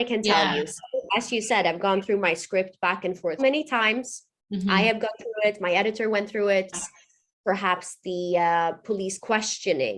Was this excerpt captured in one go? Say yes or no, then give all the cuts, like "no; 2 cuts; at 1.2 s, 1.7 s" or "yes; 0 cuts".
no; 2 cuts; at 3.4 s, 6.7 s